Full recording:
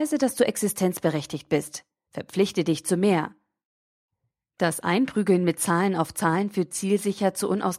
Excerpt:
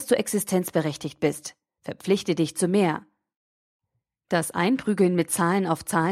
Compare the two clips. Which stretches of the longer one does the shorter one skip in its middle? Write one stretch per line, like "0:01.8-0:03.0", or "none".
none